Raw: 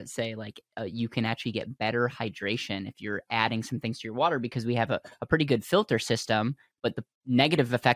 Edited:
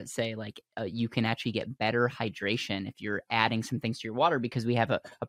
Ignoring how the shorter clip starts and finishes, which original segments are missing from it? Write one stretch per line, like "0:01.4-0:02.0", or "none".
none